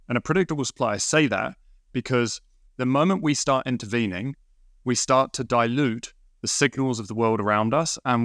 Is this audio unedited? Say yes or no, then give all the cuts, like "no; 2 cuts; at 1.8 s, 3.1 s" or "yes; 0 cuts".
yes; 0 cuts